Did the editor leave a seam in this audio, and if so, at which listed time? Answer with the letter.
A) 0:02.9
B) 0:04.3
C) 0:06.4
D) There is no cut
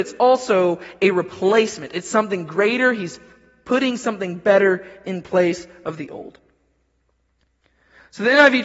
D